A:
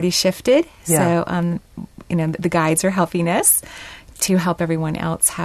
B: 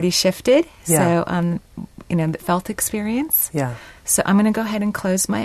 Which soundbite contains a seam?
B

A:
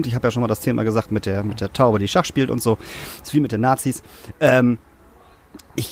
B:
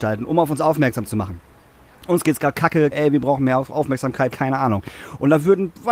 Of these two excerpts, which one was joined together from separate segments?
B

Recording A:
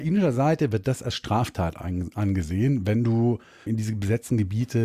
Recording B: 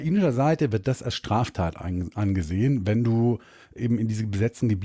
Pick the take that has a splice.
A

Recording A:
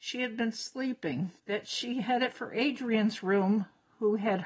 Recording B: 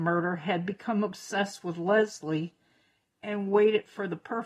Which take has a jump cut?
A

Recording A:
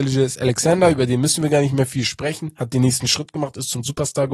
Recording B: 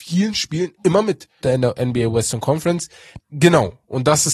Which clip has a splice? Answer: B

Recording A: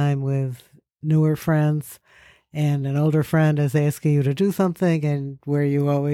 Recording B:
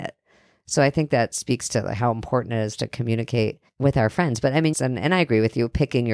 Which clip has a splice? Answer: B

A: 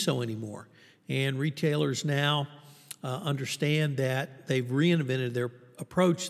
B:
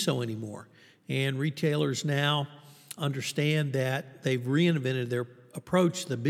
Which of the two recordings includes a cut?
B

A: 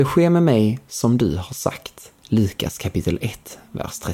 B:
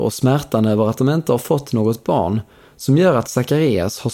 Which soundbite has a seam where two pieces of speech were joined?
A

